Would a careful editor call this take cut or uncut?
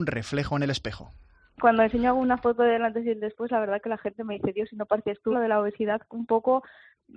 cut